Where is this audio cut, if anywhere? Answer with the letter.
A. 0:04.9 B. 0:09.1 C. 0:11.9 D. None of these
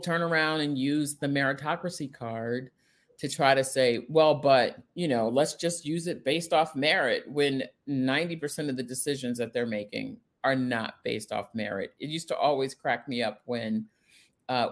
A